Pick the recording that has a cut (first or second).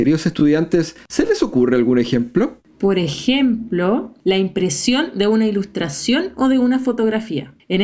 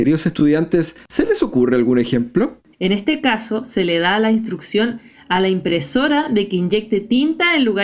second